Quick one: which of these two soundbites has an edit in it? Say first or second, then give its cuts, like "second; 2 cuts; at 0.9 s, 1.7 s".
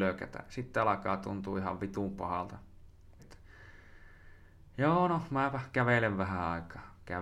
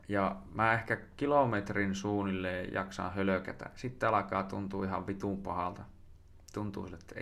first; 1 cut; at 3.2 s